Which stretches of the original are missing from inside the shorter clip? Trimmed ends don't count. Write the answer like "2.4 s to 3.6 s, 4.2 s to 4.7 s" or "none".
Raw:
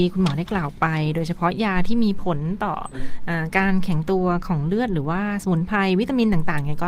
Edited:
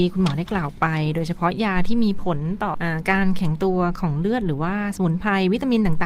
2.7 s to 3.2 s